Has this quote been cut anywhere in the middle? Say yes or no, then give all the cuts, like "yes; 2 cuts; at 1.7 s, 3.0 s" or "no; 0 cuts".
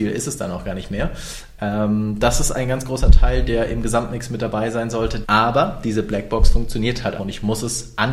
yes; 2 cuts; at 5.2 s, 7.2 s